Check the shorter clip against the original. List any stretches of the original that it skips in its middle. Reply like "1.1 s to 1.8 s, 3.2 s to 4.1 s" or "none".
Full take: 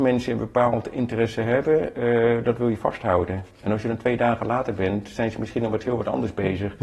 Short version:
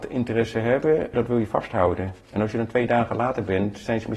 2.0 s to 2.4 s